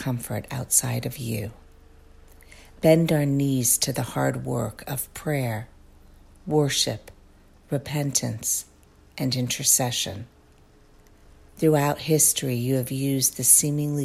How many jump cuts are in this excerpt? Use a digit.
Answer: 0